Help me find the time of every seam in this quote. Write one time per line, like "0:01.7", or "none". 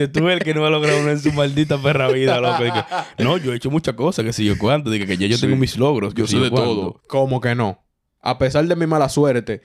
0:07.0